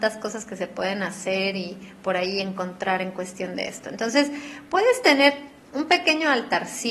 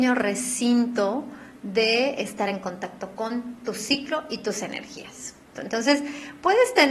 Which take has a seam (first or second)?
second